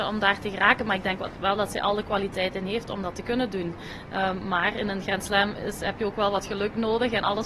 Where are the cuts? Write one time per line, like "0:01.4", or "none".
none